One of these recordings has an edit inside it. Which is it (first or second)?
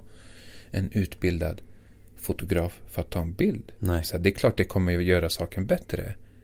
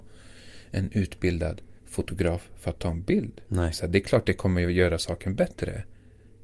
second